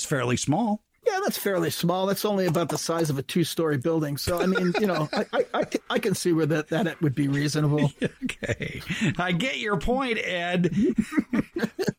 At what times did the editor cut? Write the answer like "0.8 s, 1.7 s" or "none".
none